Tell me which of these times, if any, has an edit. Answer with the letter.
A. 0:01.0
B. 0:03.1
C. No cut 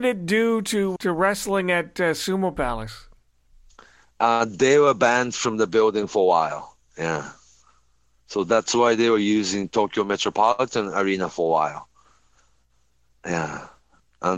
A